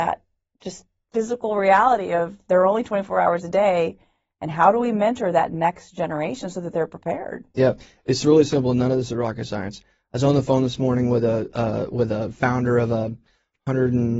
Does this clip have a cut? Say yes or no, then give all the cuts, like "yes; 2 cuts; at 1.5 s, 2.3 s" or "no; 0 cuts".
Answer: no; 0 cuts